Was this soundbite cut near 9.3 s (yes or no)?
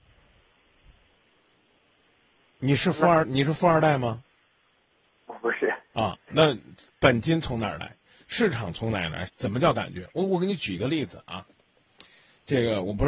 yes